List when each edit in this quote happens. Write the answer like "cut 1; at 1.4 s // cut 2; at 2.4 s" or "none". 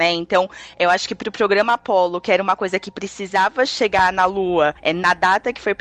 none